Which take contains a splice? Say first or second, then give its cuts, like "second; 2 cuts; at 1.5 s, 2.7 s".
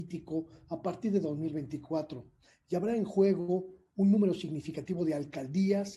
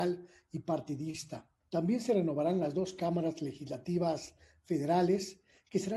second; 1 cut; at 1.6 s